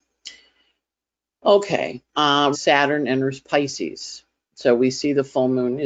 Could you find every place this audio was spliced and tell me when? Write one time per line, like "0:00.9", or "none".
0:02.5

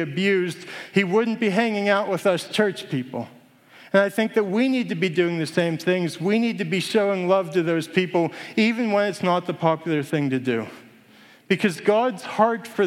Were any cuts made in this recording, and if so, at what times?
none

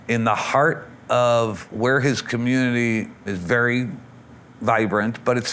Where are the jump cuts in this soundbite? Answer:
0:03.3

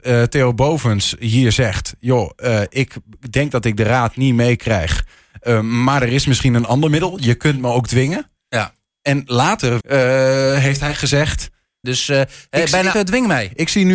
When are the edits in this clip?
0:09.8
0:11.8
0:12.9

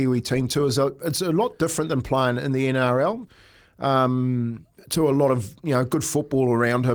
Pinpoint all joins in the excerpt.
0:03.3

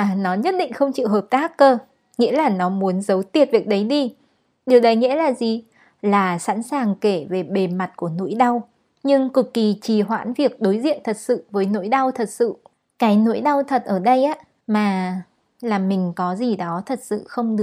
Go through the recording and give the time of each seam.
0:14.6

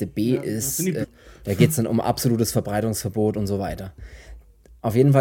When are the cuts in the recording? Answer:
0:01.0

